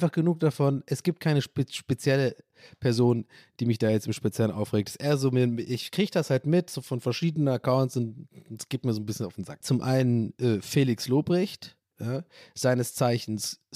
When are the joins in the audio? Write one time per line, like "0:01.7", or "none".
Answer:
0:09.6